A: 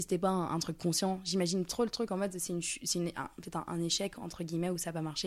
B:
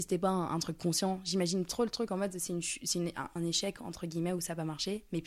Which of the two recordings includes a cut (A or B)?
B